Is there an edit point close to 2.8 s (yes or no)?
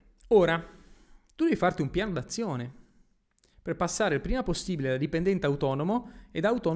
no